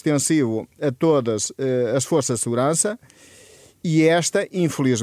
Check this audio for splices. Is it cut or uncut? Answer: uncut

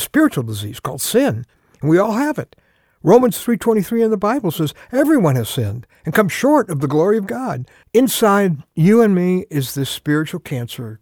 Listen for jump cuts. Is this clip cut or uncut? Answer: cut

